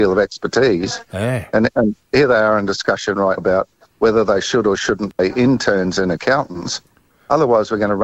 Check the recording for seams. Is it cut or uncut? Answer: cut